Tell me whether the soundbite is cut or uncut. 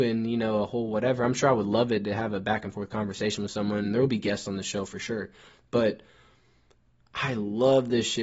uncut